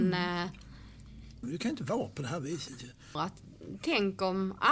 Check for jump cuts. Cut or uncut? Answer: cut